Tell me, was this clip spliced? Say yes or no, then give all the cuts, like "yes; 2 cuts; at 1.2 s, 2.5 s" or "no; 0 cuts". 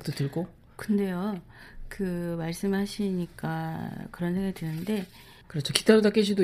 yes; 1 cut; at 5.4 s